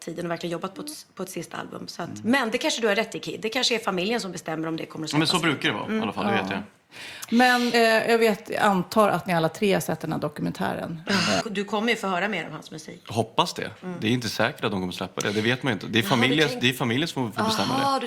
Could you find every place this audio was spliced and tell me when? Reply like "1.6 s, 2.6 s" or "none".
7.7 s, 11.4 s